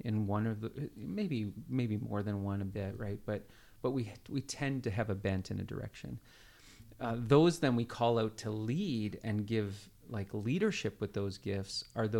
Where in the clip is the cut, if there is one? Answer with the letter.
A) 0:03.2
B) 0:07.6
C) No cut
C